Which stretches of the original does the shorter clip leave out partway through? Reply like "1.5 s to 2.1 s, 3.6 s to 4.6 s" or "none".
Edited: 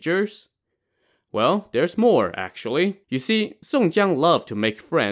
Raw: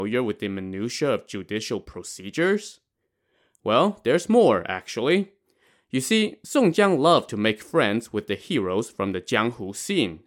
5.4 s to 5.9 s